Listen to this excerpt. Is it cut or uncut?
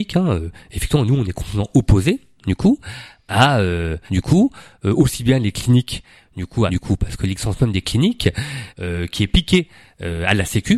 cut